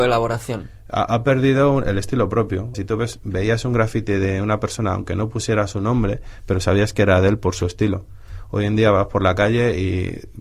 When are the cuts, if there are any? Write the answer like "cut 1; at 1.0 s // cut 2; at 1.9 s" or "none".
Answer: cut 1; at 2.7 s